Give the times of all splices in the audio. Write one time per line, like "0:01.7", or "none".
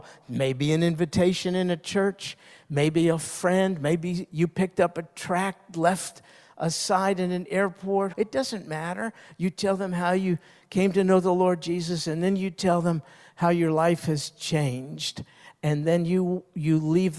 0:08.1